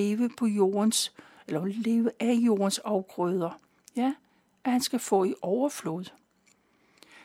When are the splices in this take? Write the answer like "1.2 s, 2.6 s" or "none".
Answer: none